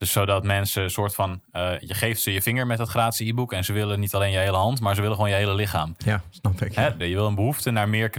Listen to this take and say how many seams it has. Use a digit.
1